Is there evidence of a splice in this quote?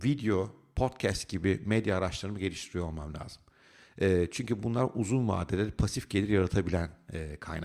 no; 0 cuts

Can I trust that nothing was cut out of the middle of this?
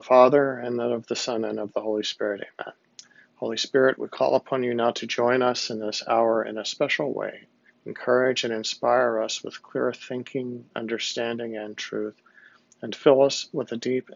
no; 1 cut; at 7.7 s

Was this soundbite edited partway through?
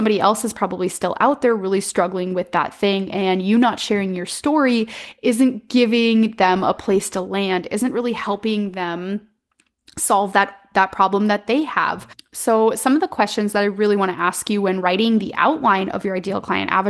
no; 0 cuts

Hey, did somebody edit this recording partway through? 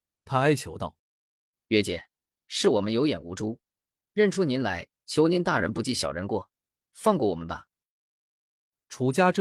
yes; 1 cut; at 1.0 s

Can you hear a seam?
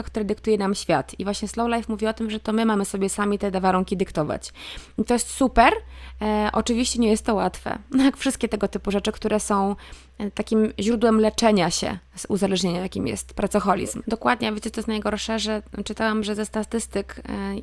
yes; 1 cut; at 14.0 s

